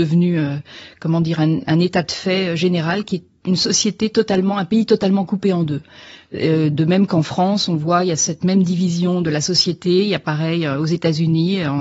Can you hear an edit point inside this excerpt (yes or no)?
no